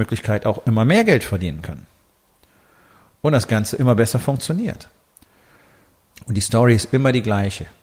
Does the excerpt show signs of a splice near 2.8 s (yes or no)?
no